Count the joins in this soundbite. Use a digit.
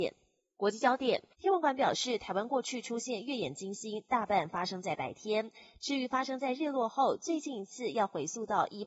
1